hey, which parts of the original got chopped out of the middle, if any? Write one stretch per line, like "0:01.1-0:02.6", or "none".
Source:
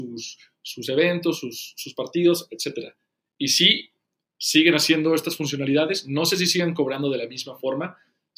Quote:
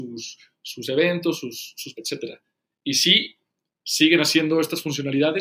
0:01.9-0:02.5